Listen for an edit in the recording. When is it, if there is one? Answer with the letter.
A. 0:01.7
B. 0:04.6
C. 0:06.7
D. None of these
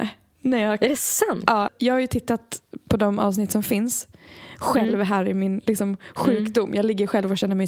A